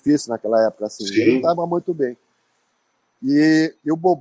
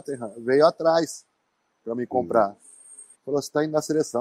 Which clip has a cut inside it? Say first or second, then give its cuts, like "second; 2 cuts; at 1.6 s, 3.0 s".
second; 1 cut; at 3.1 s